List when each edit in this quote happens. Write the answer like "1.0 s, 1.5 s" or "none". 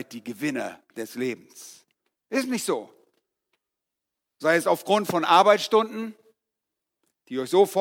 2.2 s